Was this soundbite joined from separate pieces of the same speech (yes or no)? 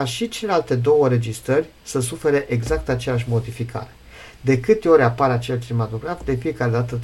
no